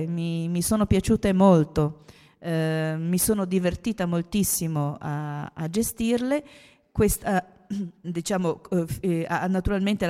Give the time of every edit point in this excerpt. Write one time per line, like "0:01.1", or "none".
0:08.0